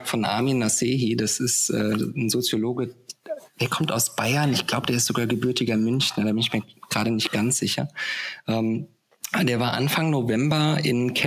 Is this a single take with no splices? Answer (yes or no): yes